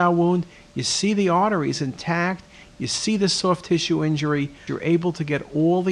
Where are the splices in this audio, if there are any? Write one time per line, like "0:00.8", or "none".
0:02.7
0:04.7